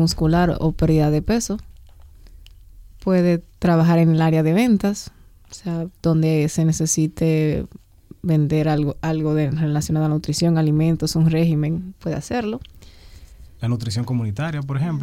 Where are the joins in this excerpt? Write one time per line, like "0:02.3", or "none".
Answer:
none